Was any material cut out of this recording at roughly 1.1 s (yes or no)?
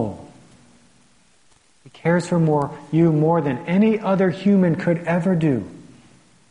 no